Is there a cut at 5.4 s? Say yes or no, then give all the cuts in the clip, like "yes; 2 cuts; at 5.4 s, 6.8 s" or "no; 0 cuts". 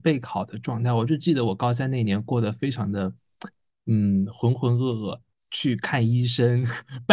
yes; 1 cut; at 5.4 s